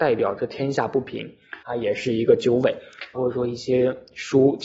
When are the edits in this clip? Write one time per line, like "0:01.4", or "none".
0:01.6
0:03.1